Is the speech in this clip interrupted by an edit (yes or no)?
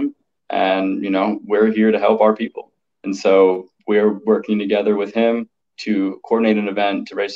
yes